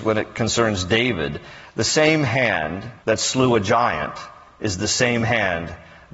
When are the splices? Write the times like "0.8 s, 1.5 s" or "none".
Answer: 3.0 s